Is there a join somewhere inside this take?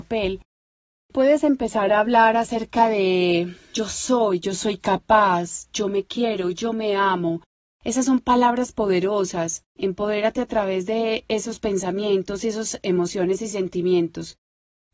yes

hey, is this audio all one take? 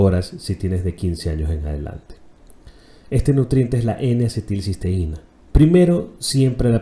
no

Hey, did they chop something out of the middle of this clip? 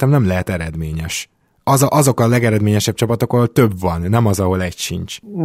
no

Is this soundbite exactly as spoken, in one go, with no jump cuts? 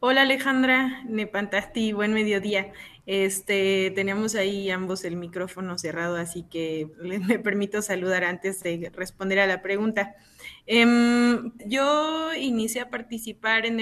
no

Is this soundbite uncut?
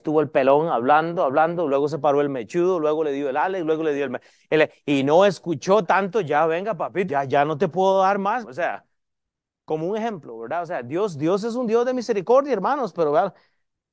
no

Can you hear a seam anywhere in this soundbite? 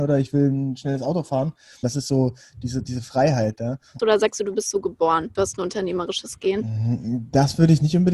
yes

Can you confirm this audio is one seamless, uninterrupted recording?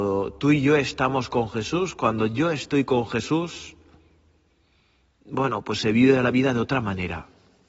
yes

